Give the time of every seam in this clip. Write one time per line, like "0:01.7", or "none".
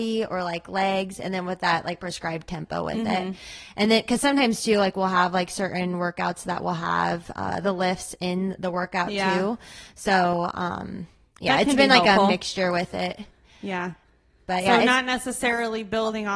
none